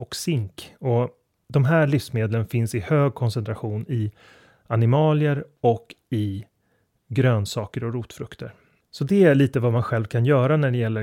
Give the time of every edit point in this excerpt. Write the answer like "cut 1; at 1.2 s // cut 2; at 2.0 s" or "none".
cut 1; at 8.8 s